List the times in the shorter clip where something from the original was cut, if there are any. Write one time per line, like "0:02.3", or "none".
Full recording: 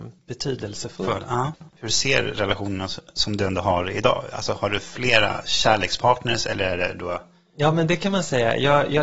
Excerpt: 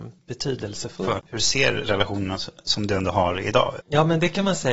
0:01.2
0:03.8